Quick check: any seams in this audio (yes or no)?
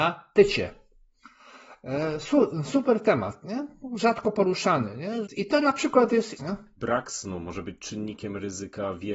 yes